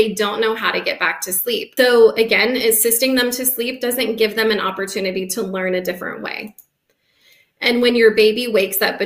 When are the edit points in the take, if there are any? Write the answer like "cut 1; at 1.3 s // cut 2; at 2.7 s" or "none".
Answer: cut 1; at 1.8 s